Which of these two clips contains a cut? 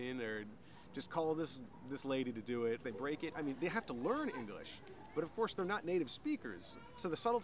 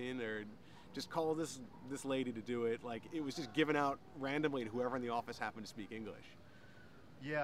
first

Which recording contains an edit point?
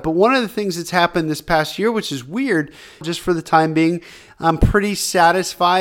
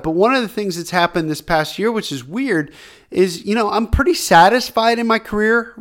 first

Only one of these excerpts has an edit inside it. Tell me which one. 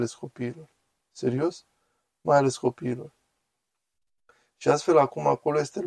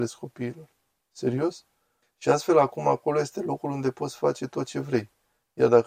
second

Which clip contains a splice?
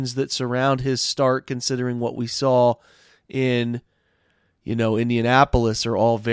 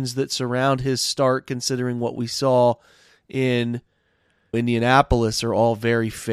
second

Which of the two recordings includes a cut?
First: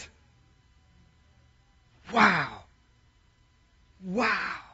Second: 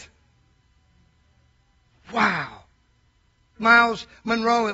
second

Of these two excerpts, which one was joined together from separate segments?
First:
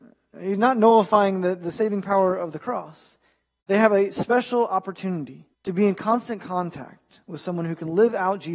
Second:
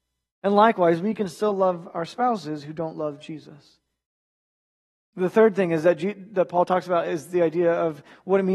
first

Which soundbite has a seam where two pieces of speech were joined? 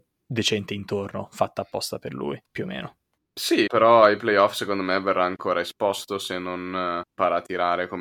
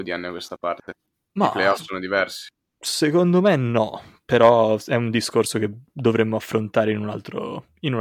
first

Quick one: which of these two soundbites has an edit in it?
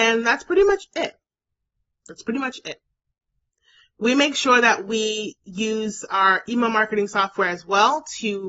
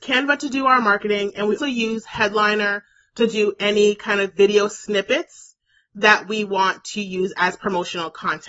second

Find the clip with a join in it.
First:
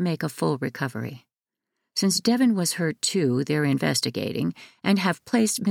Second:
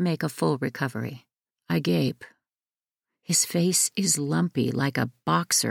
second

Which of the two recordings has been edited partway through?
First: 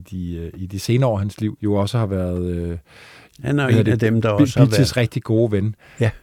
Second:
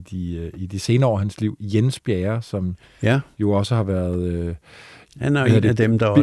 first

